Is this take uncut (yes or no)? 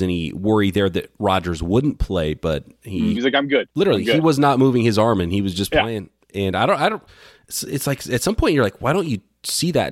no